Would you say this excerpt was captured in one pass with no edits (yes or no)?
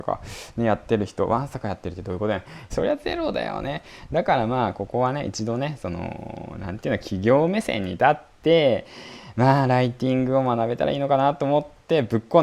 no